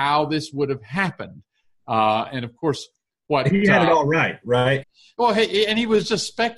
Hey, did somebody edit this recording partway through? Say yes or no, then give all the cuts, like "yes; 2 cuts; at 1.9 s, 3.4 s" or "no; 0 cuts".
yes; 1 cut; at 4.8 s